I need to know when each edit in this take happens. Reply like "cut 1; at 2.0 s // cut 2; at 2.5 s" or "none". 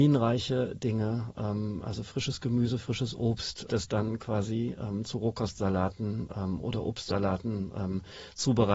cut 1; at 3.7 s